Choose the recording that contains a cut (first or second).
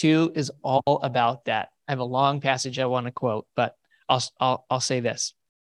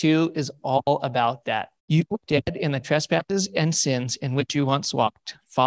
second